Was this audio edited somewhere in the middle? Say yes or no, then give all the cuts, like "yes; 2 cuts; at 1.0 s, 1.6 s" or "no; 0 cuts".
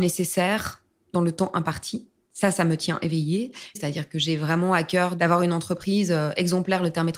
yes; 1 cut; at 3.8 s